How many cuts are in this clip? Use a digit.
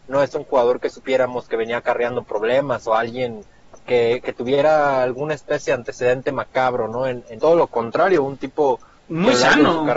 1